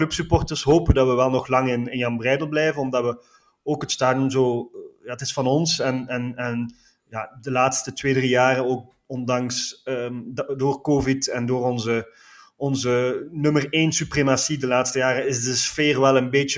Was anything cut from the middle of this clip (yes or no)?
no